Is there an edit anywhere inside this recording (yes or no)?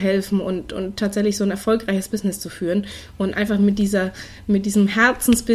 no